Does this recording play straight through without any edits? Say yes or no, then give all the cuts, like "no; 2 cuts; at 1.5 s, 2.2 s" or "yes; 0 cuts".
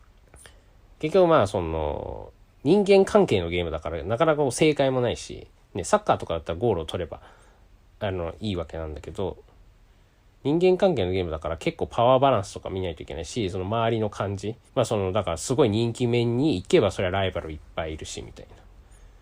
no; 1 cut; at 14.7 s